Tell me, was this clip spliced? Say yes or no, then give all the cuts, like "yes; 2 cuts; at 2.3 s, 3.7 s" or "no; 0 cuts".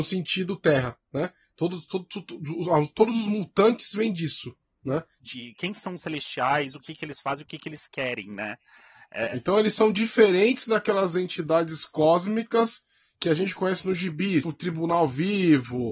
yes; 2 cuts; at 5.2 s, 14.4 s